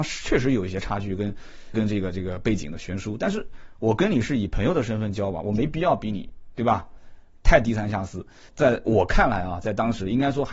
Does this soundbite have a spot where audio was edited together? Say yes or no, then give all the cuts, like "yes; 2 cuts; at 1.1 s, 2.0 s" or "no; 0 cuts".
yes; 2 cuts; at 1.7 s, 8.5 s